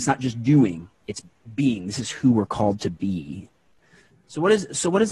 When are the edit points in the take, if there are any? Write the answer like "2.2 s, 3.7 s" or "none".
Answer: none